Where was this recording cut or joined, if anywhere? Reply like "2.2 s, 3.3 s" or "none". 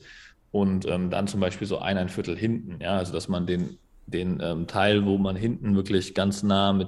none

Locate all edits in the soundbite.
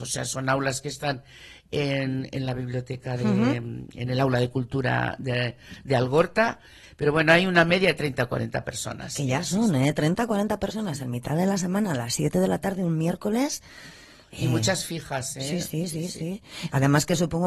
6.8 s

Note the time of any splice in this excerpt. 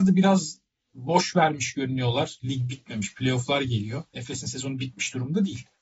2.4 s, 4.1 s

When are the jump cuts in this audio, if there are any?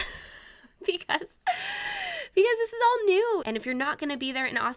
3.4 s

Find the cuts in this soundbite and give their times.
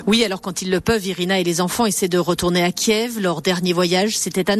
none

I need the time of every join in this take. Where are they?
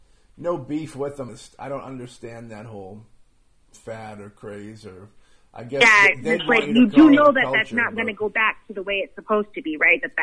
1.3 s

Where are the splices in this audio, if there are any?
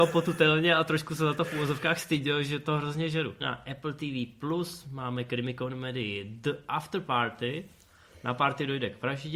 3.4 s

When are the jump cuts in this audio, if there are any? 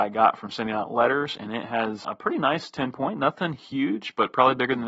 2.0 s

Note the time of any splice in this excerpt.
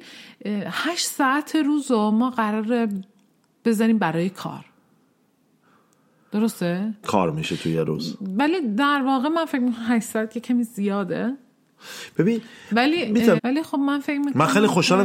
7.0 s, 13.4 s

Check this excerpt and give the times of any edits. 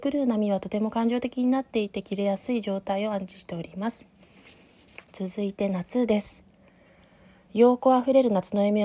5.1 s

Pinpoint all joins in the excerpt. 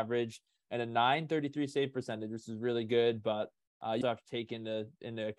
4.0 s

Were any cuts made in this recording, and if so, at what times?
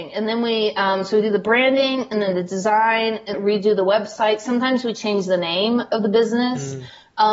3.3 s

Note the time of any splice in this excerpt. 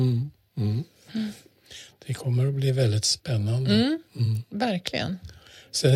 none

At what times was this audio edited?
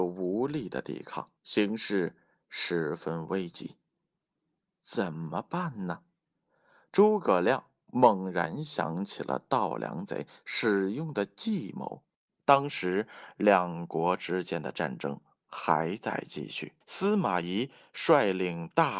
1.4 s, 12.3 s, 16.8 s

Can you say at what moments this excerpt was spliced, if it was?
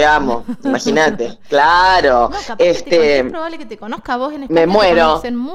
none

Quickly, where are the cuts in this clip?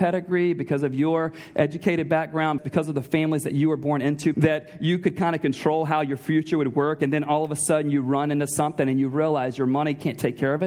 2.6 s, 4.3 s

